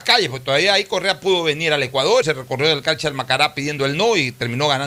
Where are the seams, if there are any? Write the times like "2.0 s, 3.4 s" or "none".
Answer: 2.2 s